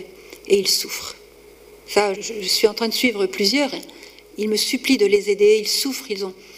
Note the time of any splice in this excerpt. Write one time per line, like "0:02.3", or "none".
0:02.1